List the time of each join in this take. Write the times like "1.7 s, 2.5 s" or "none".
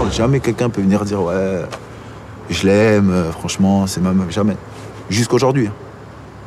none